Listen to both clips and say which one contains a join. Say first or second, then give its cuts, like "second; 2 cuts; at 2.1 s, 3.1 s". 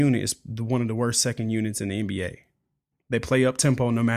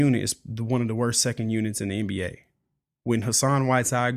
first; 1 cut; at 2.9 s